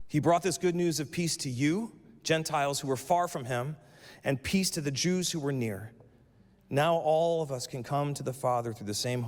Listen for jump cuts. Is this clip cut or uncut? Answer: uncut